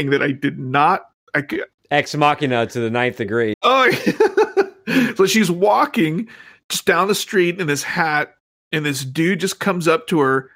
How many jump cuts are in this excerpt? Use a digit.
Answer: 1